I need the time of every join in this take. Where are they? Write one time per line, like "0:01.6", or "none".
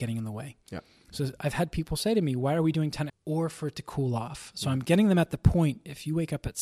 0:03.1